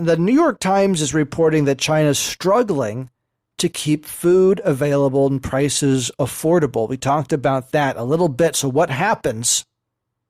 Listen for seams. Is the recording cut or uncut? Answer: uncut